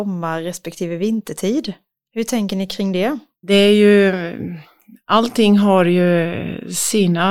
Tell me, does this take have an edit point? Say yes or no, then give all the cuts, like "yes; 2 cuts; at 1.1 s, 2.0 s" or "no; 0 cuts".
no; 0 cuts